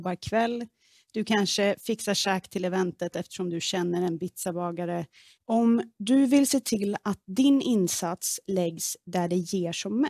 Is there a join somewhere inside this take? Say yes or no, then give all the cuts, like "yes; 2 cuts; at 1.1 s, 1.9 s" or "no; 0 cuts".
yes; 1 cut; at 5.4 s